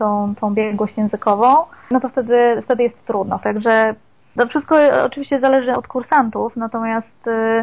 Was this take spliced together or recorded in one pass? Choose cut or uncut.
cut